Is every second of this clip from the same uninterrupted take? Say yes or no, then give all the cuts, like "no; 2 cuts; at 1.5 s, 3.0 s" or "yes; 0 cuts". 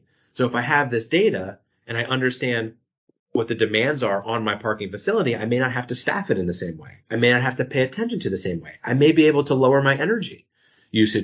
yes; 0 cuts